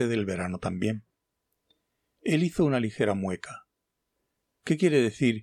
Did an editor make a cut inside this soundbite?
no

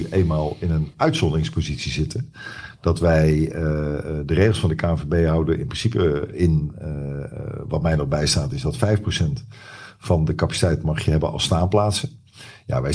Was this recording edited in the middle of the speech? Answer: no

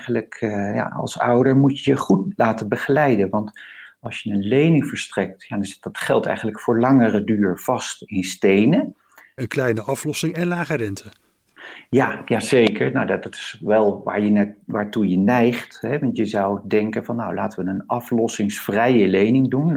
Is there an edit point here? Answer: yes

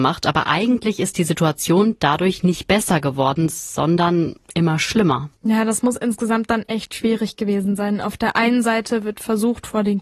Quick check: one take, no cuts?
no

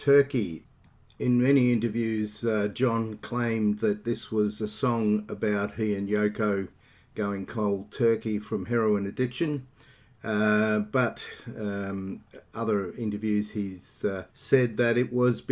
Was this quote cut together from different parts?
yes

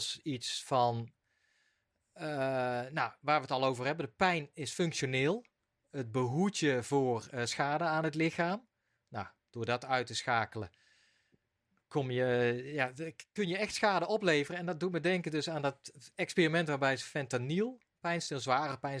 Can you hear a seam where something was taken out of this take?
no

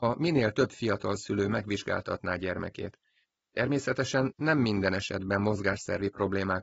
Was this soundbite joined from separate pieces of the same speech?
no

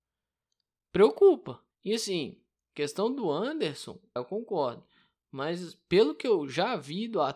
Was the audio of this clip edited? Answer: yes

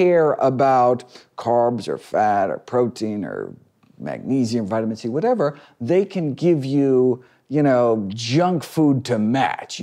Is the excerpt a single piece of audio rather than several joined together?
yes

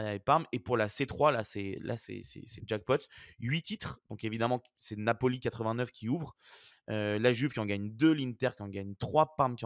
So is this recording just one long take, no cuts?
yes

